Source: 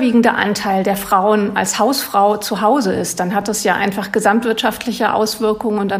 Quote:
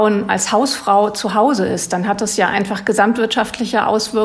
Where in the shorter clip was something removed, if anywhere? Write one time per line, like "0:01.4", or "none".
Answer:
none